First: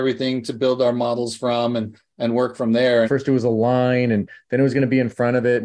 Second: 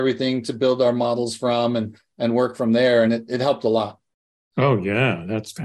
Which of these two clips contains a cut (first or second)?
first